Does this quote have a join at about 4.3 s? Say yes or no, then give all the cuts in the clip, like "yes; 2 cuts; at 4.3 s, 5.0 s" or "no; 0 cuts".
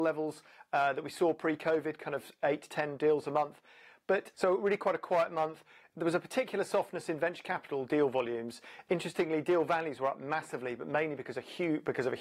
yes; 1 cut; at 4.3 s